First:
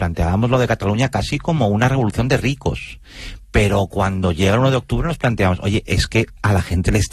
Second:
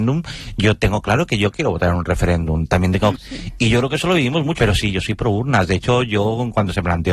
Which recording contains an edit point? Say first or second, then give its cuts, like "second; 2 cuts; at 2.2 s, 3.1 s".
second; 2 cuts; at 3.2 s, 4.6 s